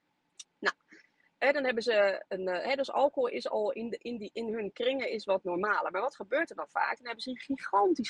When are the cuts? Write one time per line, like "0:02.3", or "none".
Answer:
none